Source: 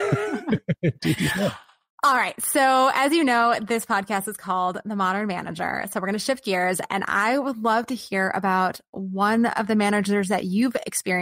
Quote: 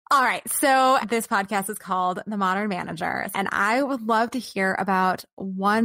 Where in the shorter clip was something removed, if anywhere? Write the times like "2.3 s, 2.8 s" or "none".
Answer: 1.0 s, 3.3 s